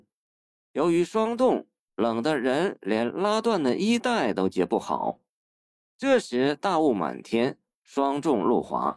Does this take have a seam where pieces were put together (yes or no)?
no